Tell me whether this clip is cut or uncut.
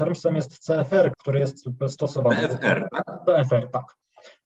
cut